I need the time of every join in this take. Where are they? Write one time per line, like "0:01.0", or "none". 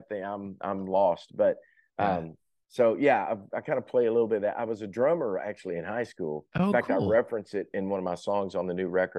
none

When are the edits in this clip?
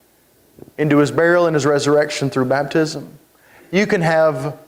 0:03.6

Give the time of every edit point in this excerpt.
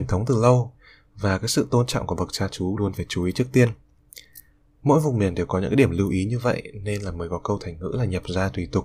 0:02.8

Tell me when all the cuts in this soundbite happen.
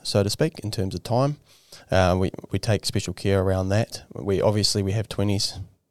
0:02.5

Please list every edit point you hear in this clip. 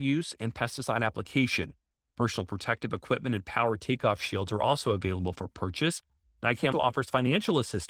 0:06.7

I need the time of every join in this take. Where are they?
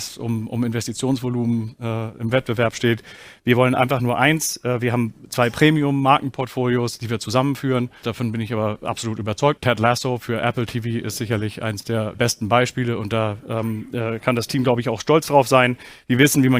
0:08.0
0:09.6
0:12.1

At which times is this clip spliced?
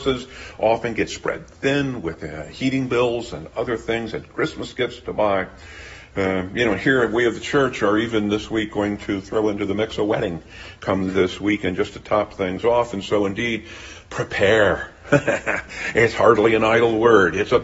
none

